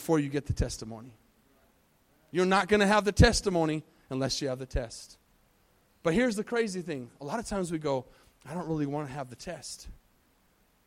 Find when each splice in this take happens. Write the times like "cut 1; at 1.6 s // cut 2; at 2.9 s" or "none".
none